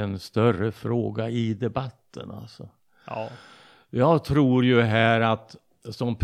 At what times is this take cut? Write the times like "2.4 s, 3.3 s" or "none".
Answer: none